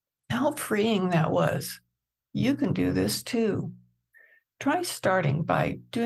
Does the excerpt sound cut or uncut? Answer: uncut